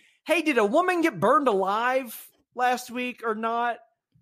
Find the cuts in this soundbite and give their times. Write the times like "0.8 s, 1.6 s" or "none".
none

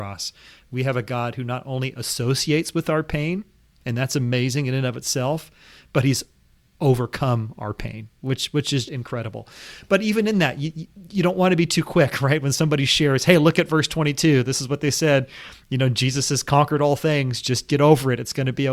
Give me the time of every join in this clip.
8.8 s, 17.7 s

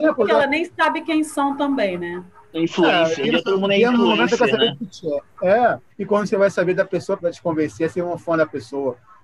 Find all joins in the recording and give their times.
3.2 s, 5.9 s, 7.2 s

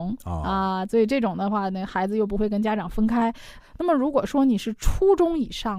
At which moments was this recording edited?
3.6 s

